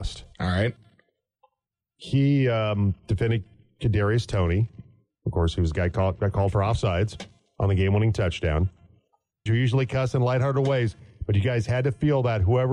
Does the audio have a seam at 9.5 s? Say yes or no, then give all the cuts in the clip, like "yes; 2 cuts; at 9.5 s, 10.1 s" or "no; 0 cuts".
yes; 1 cut; at 9.5 s